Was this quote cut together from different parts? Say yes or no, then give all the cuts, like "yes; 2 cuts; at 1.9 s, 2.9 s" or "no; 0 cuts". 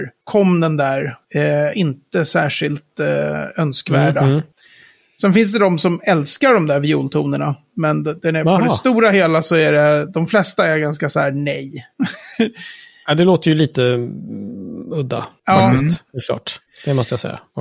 no; 0 cuts